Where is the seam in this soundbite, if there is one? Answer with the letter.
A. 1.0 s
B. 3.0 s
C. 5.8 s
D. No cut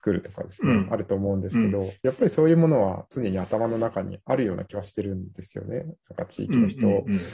D